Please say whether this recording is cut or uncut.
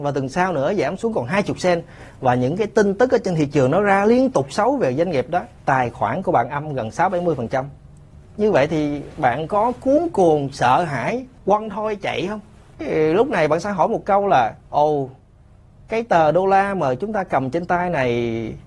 cut